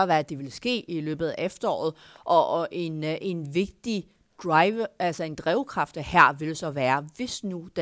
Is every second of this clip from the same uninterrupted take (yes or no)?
yes